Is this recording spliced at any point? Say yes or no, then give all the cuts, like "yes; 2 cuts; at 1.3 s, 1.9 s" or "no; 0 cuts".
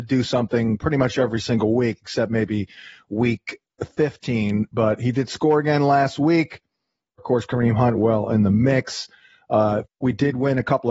yes; 2 cuts; at 7.2 s, 9.8 s